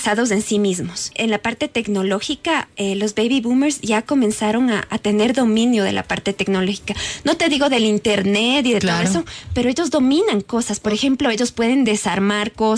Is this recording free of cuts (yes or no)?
no